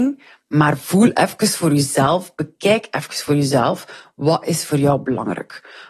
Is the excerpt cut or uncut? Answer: uncut